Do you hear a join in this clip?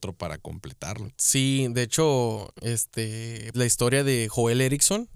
yes; 1 cut; at 3.5 s

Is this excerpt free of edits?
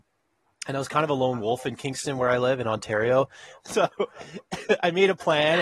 no; 1 cut; at 3.6 s

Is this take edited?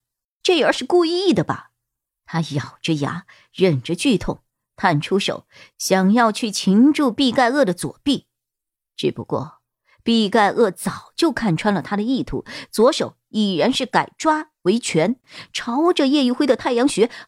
yes; 1 cut; at 2.2 s

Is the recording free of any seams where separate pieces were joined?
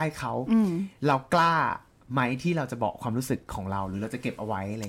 no; 1 cut; at 1.0 s

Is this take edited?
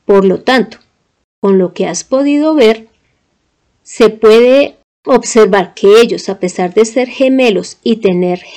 no; 0 cuts

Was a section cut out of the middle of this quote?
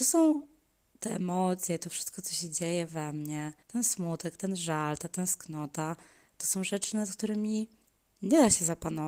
yes; 1 cut; at 3.6 s

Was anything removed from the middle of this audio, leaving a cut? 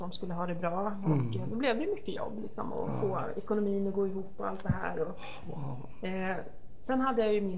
no; 0 cuts

